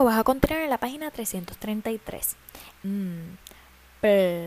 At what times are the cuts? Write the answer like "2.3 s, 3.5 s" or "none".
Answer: 2.7 s